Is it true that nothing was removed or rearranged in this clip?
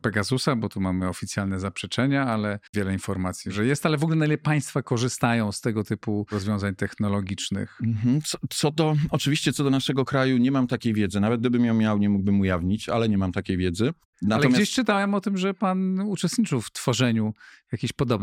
yes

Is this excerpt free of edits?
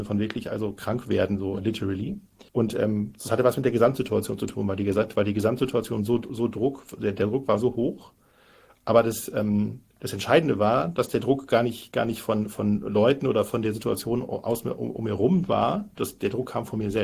no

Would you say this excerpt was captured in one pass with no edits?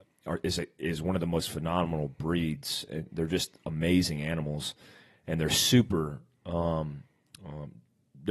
yes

